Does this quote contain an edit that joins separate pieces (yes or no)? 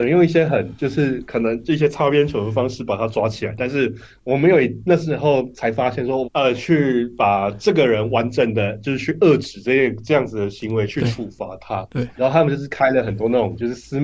yes